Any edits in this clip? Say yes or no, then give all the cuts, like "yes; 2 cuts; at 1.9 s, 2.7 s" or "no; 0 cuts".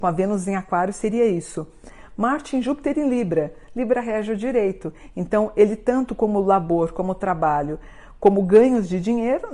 no; 0 cuts